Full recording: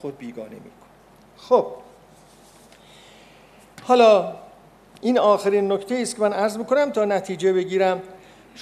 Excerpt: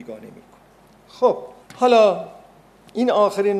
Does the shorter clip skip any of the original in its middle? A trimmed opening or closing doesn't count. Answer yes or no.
yes